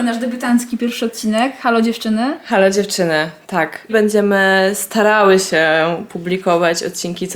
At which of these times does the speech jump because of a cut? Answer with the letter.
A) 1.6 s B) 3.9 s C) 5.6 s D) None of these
B